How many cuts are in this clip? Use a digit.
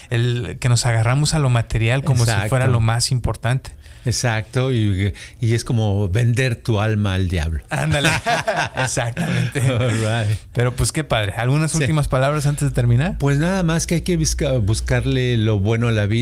0